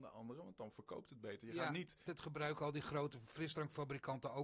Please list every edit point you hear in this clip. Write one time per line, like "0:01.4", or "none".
0:02.1